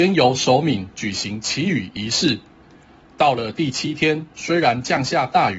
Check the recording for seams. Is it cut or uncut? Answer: uncut